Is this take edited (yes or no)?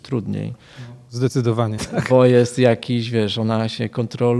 yes